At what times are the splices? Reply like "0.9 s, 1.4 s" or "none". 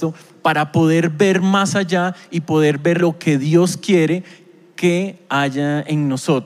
3.0 s